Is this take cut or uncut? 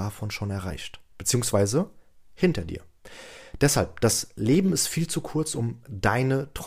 uncut